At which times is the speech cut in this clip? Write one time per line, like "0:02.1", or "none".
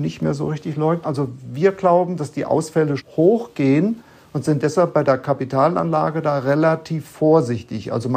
0:01.0
0:03.0